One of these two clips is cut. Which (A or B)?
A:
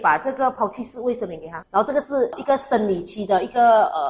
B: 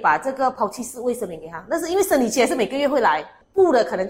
A